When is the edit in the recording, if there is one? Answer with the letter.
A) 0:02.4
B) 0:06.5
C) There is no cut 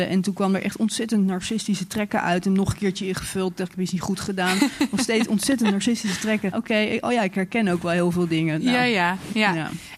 B